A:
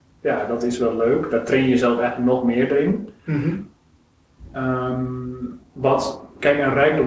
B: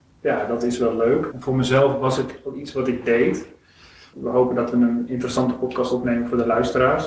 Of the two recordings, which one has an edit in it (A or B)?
B